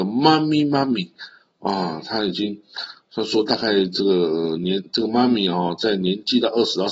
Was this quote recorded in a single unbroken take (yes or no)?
yes